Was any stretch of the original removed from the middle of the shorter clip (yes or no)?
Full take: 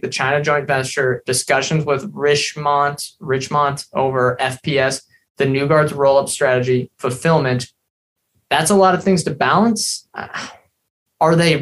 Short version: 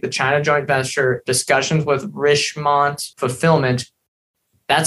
yes